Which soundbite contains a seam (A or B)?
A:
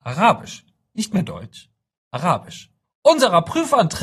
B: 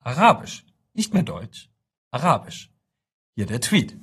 A